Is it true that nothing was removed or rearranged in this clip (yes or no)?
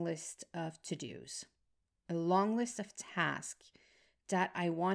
yes